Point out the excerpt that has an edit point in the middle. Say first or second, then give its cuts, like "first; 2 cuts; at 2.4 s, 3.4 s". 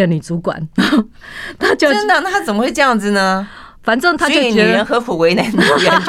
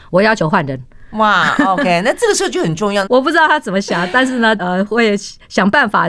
second; 2 cuts; at 3.1 s, 4.6 s